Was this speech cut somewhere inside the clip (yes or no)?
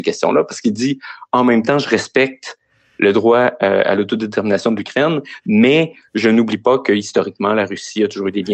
no